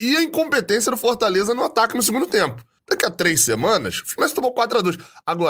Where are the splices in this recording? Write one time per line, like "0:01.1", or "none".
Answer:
0:02.8

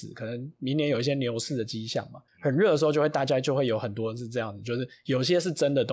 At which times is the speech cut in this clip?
0:02.3

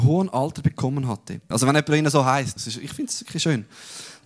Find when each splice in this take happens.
0:01.5
0:02.6

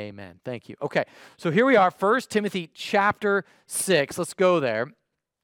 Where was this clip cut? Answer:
none

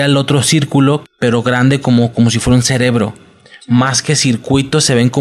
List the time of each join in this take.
0:01.0

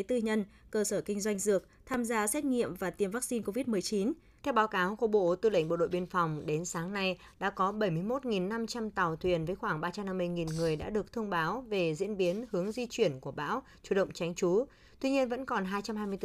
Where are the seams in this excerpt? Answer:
0:04.4

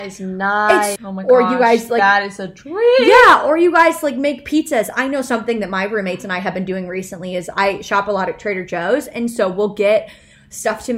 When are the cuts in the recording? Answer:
0:01.0

